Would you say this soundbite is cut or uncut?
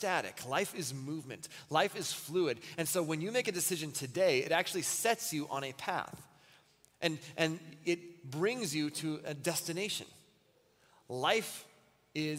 uncut